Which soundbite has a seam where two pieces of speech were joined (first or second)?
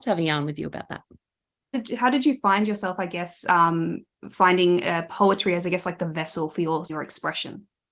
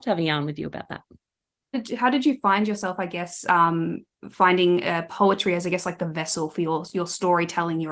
first